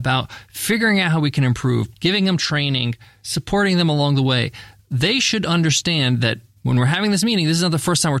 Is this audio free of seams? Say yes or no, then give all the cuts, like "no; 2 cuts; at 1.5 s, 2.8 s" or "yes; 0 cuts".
no; 1 cut; at 1.9 s